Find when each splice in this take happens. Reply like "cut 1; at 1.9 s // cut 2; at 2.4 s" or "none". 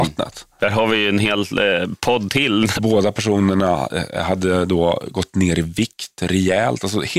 cut 1; at 2.8 s